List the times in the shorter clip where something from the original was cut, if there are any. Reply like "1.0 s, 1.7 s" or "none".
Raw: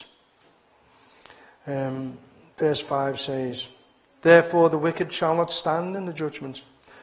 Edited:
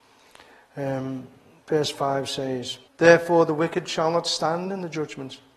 2.9 s